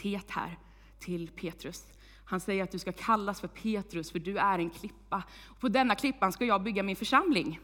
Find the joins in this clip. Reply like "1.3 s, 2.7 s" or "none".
none